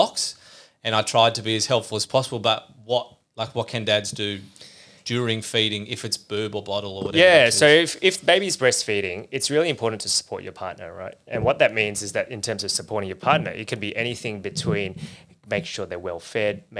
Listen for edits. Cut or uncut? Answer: uncut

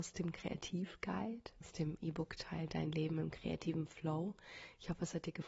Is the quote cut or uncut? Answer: cut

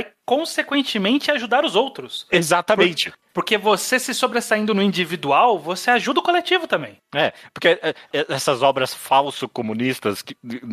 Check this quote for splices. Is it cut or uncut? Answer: uncut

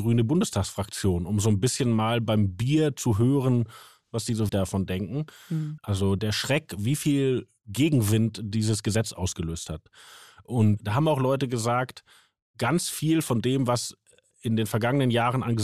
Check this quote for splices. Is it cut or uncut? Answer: cut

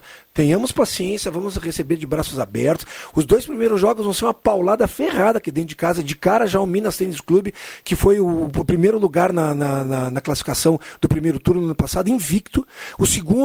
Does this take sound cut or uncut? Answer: uncut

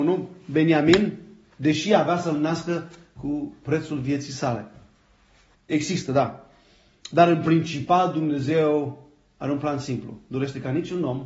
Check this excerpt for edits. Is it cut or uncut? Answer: cut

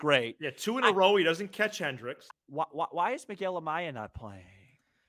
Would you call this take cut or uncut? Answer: cut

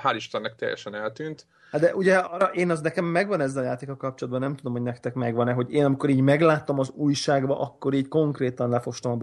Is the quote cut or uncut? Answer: uncut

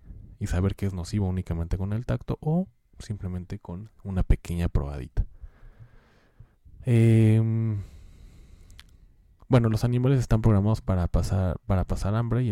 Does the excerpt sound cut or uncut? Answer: uncut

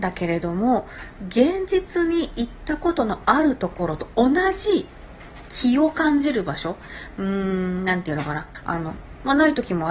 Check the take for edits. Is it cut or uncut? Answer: cut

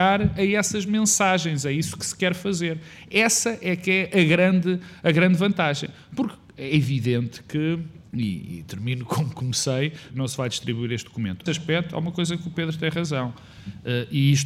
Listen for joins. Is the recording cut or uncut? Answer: cut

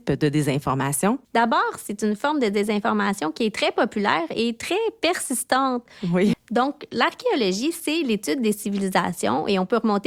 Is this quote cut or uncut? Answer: cut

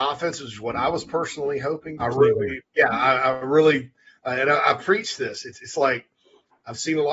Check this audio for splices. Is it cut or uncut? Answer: cut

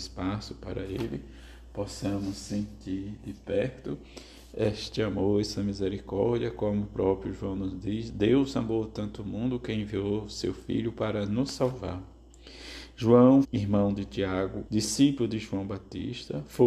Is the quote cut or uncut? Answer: cut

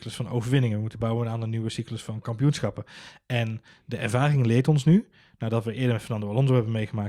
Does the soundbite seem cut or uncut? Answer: uncut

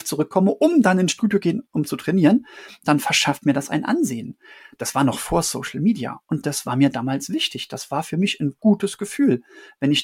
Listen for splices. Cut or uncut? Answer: uncut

